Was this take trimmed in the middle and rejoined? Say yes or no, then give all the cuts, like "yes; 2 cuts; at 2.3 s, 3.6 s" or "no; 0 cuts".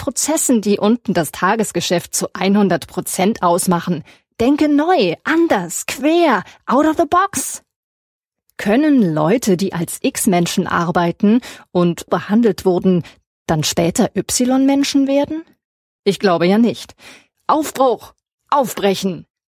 yes; 3 cuts; at 12.1 s, 15.8 s, 17.3 s